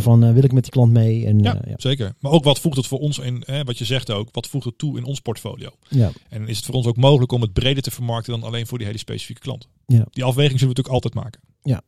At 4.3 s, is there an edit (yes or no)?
yes